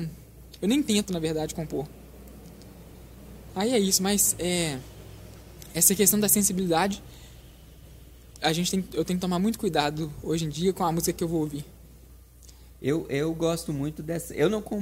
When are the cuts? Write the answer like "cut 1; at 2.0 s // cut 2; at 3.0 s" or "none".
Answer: none